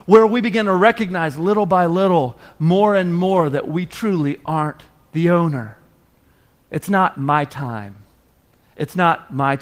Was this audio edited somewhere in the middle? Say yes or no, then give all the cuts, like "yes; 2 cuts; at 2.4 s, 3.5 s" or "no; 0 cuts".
no; 0 cuts